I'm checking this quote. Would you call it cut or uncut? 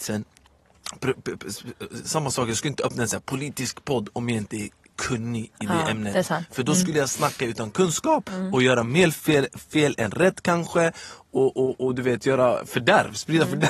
uncut